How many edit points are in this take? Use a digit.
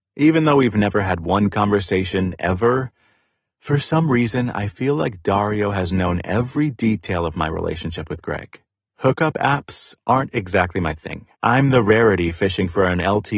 2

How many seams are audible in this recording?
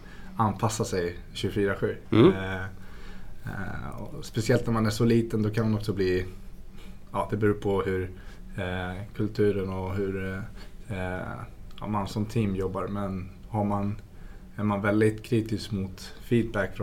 0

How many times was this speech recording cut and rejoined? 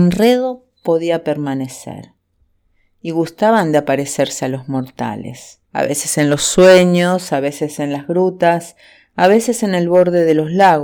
1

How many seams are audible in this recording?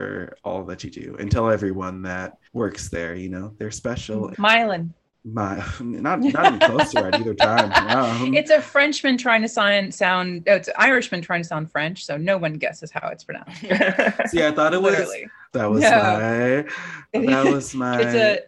3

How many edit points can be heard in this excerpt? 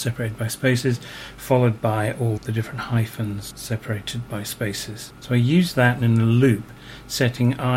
2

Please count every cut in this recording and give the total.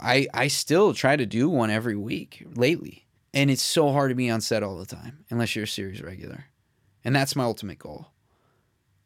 1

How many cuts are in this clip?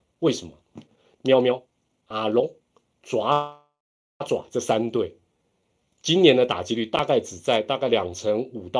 1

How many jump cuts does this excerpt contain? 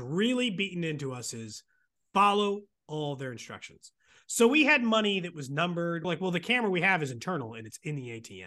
1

